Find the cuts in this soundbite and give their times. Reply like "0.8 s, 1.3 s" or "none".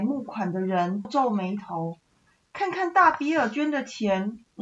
1.0 s